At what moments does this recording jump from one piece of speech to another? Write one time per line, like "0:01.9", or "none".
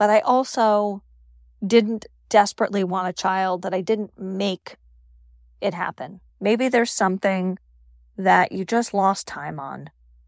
0:06.3